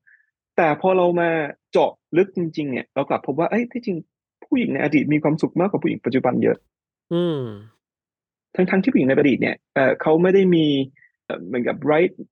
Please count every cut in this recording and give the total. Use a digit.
1